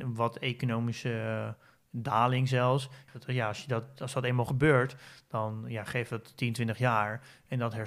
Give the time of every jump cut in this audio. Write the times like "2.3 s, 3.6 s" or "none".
3.1 s

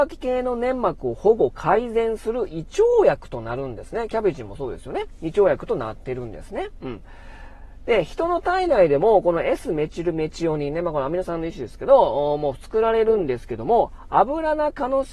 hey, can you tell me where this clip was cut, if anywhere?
none

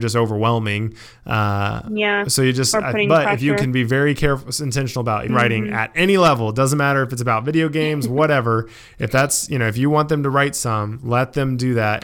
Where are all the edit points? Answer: 5.3 s

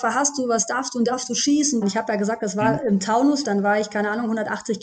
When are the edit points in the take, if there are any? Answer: 1.8 s, 3.4 s

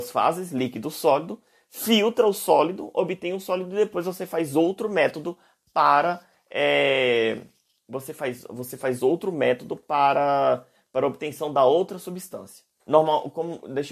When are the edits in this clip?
12.8 s

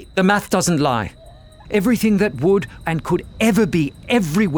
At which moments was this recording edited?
1.7 s, 2.8 s

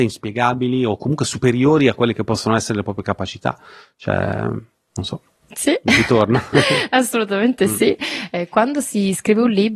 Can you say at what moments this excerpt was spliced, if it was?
none

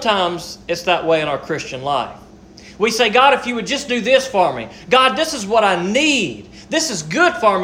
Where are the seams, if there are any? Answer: none

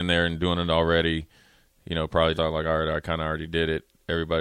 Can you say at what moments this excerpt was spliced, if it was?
2.3 s

